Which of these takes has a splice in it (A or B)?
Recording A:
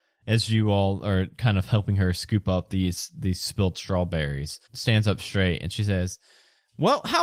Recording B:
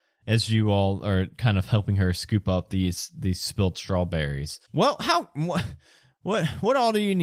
B